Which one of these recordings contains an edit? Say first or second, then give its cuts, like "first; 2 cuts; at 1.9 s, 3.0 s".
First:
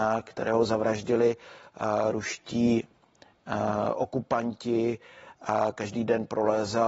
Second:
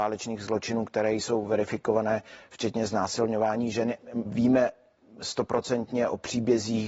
second; 1 cut; at 4.3 s